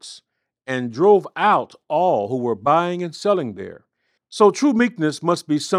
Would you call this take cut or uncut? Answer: cut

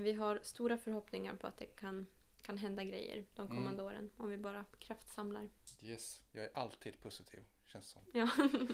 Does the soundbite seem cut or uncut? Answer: uncut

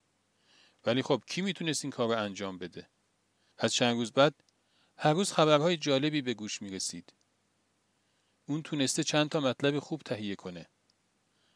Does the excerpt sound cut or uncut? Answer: cut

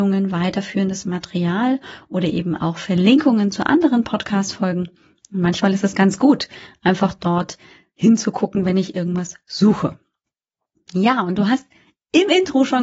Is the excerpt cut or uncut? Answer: uncut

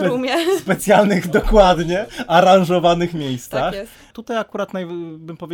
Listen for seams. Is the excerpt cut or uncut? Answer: cut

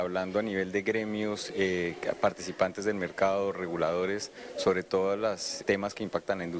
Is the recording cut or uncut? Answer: cut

